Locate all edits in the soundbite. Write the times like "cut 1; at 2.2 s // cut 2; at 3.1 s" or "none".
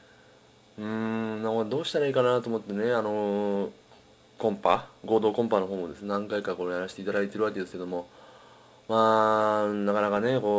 none